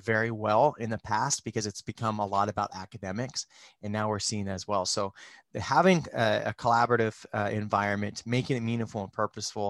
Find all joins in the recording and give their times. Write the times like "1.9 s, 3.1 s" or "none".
none